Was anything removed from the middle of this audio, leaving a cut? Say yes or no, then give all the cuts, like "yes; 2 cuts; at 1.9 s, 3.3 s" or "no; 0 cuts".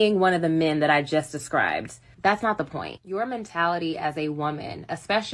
yes; 1 cut; at 2.1 s